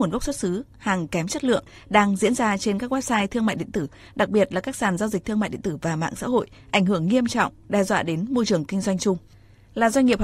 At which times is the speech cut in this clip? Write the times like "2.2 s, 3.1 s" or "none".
none